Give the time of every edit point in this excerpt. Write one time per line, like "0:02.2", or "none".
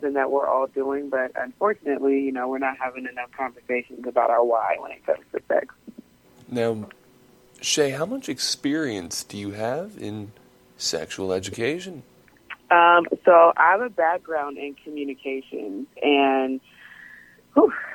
none